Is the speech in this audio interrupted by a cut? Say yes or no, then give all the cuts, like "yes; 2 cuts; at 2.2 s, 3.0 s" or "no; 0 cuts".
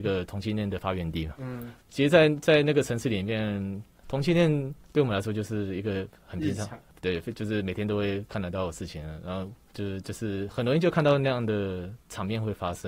yes; 2 cuts; at 1.8 s, 9.7 s